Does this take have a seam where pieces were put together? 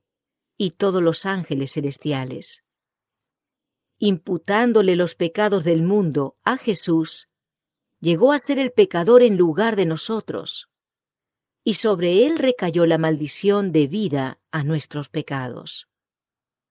no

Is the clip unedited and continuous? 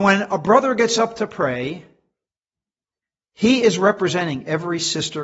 yes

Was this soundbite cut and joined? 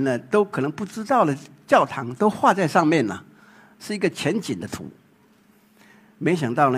no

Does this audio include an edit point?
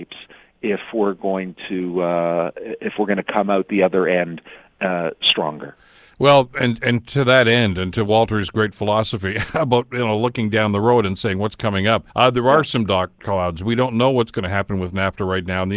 yes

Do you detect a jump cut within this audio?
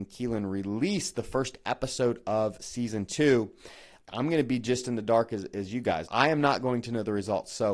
yes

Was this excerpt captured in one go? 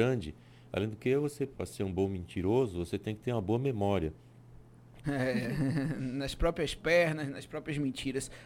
no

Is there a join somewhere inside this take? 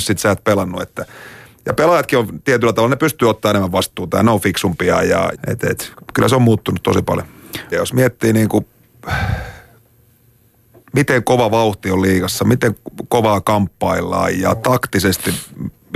yes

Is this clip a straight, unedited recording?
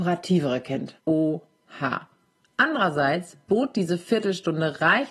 no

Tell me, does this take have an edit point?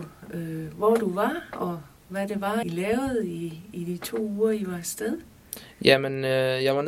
yes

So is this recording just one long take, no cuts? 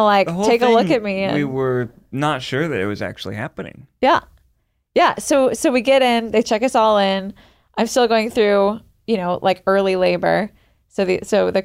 yes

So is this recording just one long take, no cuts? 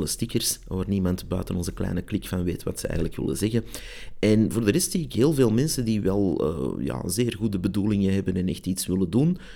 yes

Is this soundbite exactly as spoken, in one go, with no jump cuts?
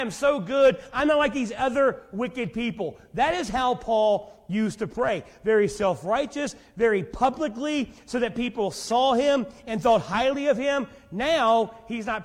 yes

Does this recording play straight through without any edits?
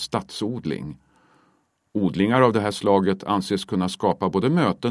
yes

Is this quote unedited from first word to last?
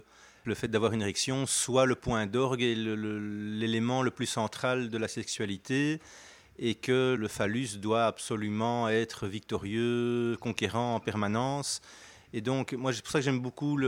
yes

